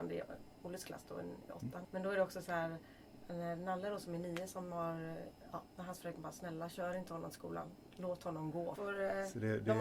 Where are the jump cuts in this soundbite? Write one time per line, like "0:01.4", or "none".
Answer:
0:01.8
0:08.8